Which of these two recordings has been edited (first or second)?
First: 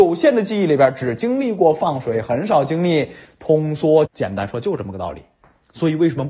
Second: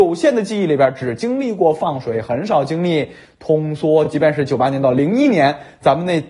first